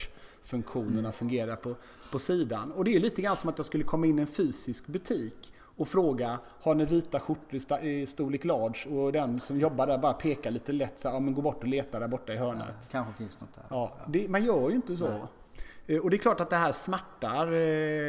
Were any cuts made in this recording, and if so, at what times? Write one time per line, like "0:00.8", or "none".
none